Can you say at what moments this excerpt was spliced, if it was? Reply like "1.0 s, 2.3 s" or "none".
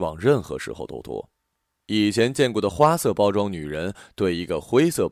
1.8 s

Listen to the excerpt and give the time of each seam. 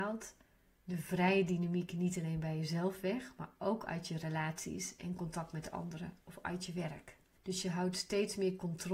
7.4 s

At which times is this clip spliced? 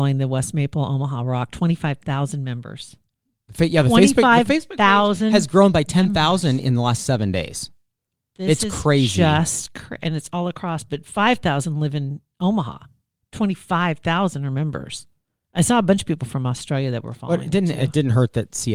none

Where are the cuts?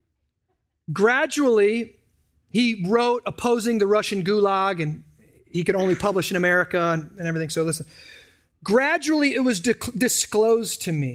none

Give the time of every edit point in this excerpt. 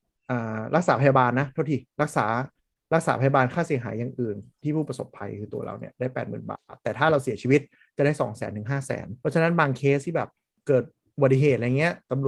9.2 s

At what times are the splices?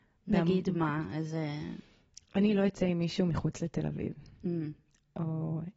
none

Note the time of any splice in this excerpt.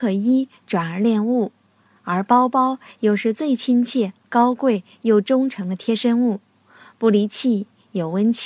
none

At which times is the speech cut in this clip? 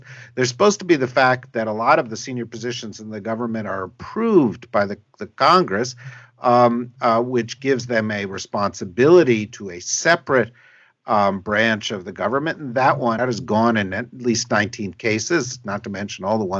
13.2 s

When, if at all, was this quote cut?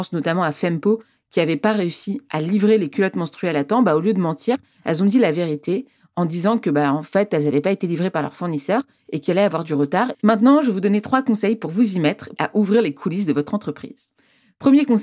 10.1 s, 12.4 s

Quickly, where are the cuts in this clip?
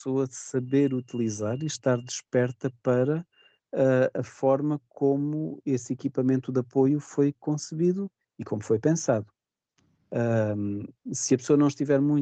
none

